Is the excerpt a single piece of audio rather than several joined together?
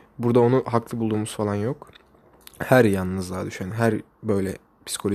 yes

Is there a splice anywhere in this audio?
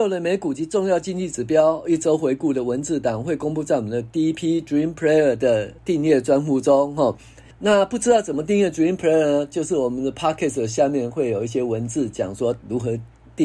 yes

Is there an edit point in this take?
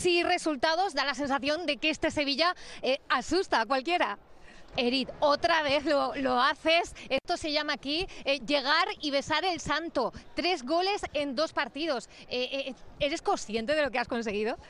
yes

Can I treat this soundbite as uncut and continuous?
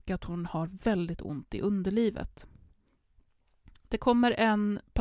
yes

